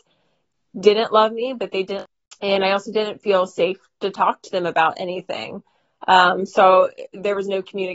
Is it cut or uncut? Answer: uncut